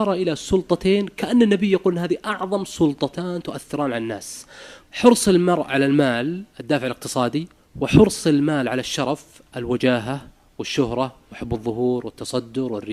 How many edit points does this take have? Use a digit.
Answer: 2